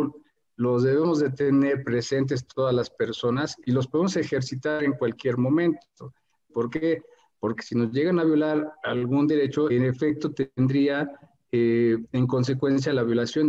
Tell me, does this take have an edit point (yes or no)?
yes